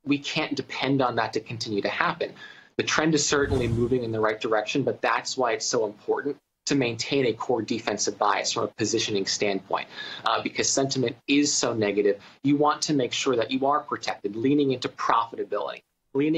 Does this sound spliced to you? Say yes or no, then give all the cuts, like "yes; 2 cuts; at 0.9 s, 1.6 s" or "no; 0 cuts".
no; 0 cuts